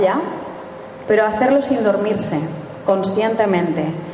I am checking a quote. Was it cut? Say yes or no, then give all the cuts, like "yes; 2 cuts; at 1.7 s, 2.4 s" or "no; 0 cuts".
yes; 1 cut; at 1.0 s